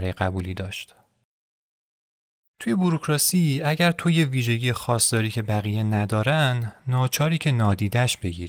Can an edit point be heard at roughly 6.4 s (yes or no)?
no